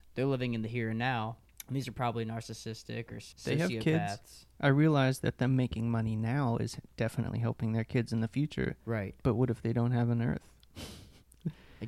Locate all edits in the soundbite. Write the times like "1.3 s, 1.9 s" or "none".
none